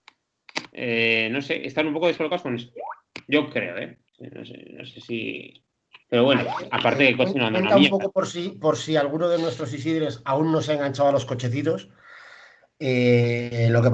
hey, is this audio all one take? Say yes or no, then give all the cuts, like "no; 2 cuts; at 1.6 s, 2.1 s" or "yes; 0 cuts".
no; 2 cuts; at 4.1 s, 6.0 s